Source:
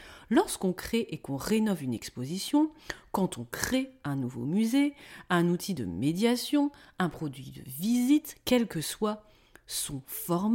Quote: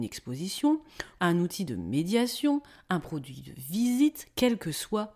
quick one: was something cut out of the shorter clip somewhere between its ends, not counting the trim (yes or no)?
yes